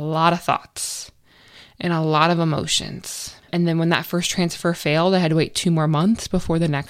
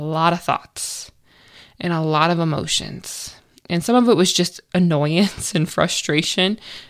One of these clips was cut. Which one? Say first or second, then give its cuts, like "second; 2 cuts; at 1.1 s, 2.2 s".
first; 1 cut; at 3.4 s